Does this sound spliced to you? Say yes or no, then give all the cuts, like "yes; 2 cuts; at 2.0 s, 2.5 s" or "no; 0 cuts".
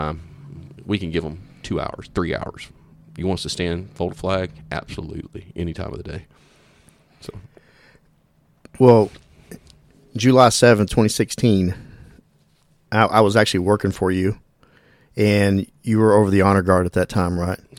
no; 0 cuts